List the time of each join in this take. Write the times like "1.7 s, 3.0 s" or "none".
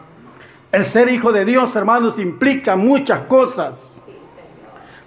none